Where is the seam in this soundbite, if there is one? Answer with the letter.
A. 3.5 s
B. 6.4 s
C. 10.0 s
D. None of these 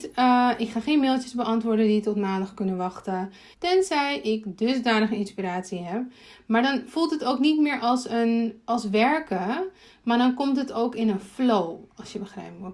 A